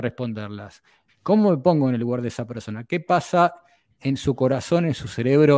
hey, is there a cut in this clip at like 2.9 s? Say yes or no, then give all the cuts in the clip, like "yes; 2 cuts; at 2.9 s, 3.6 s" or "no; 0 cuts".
no; 1 cut; at 1.1 s